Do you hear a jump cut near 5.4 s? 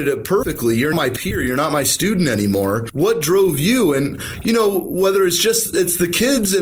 no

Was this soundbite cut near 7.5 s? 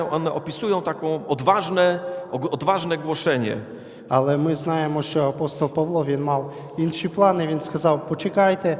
no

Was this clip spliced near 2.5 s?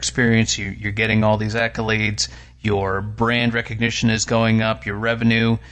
no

